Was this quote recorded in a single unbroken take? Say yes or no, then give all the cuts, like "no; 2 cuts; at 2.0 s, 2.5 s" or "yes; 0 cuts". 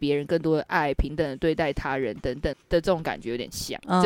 no; 1 cut; at 2.5 s